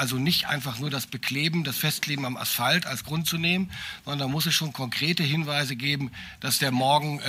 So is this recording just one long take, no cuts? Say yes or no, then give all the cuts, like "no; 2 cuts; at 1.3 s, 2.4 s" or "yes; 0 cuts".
yes; 0 cuts